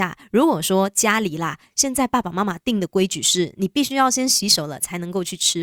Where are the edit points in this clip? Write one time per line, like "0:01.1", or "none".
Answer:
none

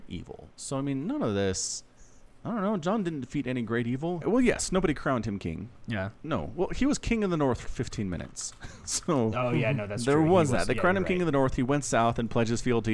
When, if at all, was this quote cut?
0:04.2
0:07.6

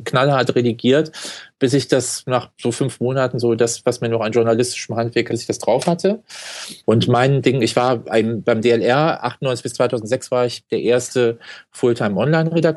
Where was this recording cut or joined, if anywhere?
0:05.3
0:06.8

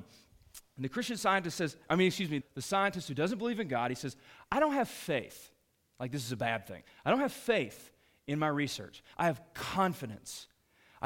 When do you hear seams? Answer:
0:02.4
0:09.1

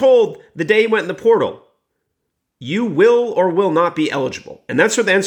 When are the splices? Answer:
none

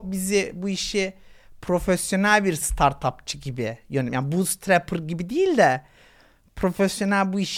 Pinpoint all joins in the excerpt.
none

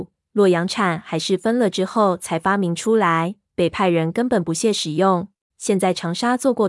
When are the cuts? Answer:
0:05.5

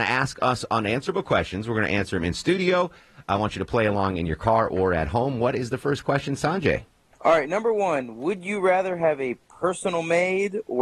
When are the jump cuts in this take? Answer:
none

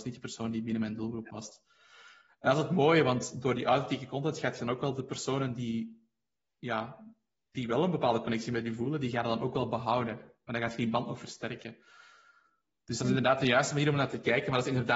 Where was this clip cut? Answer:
none

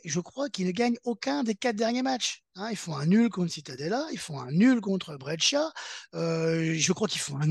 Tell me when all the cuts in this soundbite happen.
none

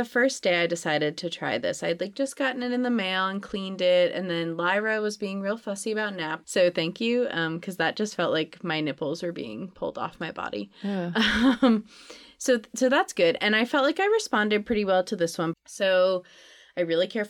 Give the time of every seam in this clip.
0:06.4
0:15.5

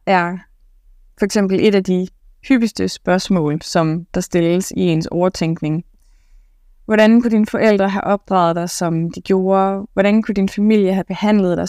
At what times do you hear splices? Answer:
none

